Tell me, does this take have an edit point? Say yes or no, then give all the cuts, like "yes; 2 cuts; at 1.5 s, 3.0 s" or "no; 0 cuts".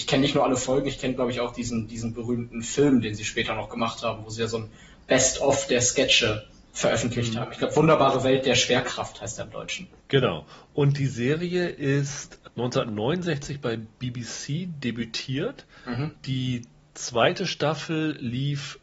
no; 0 cuts